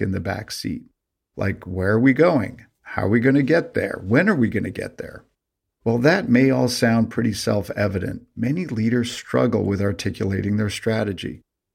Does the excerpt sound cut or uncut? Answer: uncut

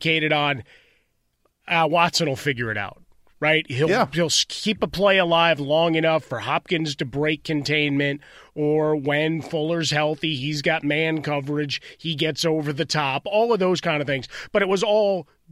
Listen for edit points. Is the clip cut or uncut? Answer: uncut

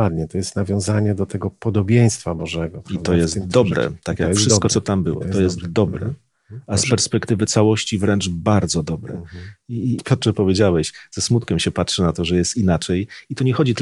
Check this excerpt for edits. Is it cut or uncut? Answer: cut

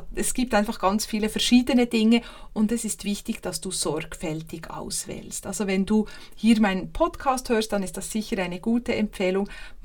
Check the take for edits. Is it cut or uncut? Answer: uncut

